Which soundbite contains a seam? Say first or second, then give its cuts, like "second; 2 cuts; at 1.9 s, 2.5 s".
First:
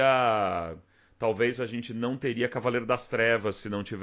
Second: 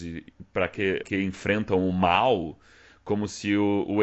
second; 1 cut; at 1.0 s